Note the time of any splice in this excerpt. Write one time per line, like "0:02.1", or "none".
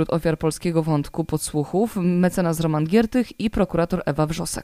none